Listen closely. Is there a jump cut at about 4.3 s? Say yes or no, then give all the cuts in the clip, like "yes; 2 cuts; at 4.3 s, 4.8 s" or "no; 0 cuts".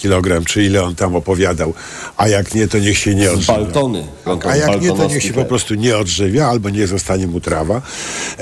yes; 1 cut; at 4.3 s